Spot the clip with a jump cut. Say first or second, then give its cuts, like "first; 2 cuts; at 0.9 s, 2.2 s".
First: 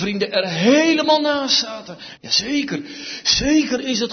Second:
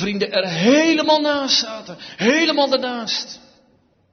first; 1 cut; at 2.2 s